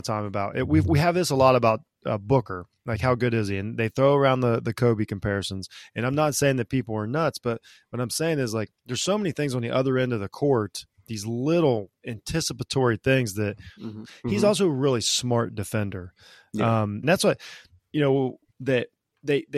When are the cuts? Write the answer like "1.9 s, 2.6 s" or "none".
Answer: 14.0 s, 17.0 s, 18.5 s